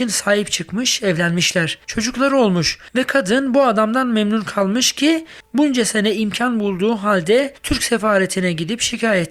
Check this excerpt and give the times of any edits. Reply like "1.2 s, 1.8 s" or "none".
none